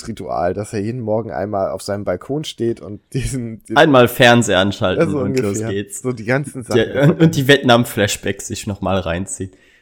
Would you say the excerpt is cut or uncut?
uncut